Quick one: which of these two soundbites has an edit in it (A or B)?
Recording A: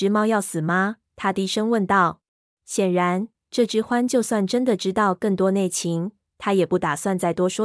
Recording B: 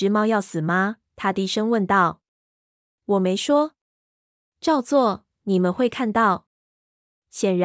A